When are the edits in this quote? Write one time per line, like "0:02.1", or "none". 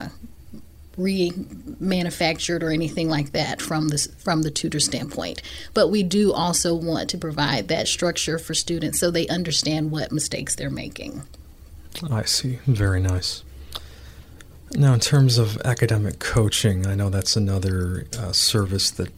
none